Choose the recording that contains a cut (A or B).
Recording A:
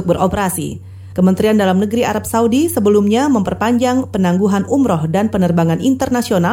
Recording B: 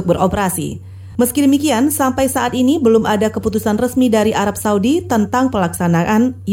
A